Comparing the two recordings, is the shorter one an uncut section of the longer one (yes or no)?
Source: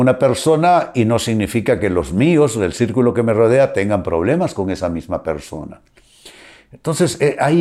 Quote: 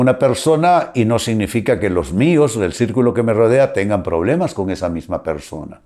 yes